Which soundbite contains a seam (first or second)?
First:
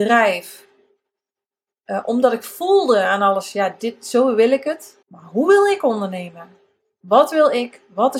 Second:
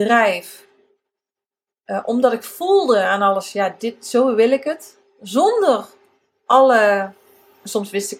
first